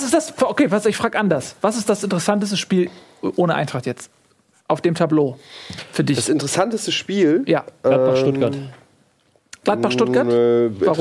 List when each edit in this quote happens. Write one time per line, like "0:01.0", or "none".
none